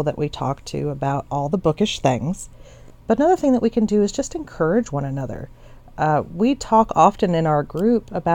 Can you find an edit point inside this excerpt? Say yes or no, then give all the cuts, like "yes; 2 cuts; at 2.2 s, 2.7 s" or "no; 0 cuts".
no; 0 cuts